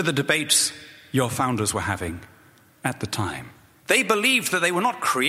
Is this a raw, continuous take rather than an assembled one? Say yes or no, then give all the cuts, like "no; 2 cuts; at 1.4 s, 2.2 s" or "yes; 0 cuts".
no; 1 cut; at 3.7 s